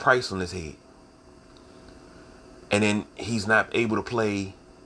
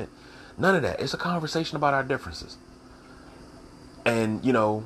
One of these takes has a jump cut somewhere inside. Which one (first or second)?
second